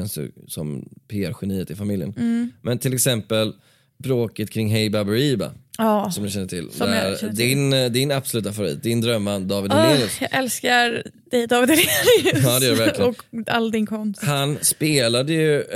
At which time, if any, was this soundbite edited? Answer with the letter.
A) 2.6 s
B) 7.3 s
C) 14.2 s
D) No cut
D